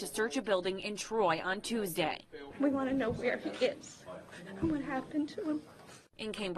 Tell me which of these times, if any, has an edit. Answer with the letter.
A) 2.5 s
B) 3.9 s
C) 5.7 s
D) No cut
A